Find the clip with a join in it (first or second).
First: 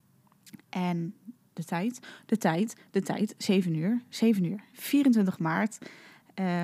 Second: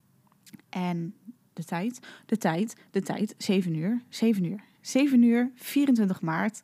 first